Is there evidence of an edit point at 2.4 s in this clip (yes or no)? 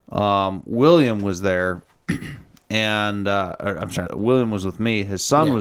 no